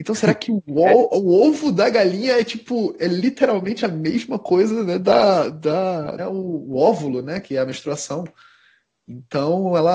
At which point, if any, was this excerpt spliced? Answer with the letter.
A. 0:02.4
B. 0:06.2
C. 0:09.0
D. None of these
B